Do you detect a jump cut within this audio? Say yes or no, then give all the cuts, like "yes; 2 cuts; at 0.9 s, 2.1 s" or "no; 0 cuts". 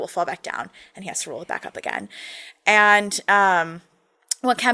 no; 0 cuts